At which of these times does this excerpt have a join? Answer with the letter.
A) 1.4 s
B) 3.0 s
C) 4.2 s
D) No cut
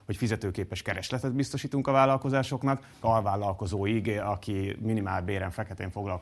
B